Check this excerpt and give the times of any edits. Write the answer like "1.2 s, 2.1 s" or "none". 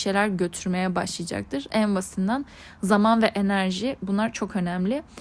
none